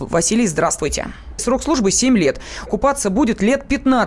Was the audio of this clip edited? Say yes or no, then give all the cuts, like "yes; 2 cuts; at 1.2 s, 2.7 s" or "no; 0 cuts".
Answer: yes; 2 cuts; at 1.4 s, 2.7 s